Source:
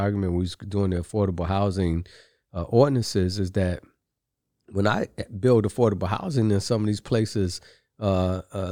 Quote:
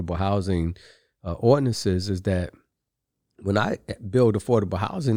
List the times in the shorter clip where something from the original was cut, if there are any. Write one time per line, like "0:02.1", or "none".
none